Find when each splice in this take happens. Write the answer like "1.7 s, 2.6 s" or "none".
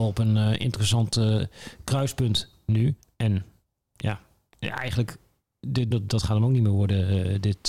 5.9 s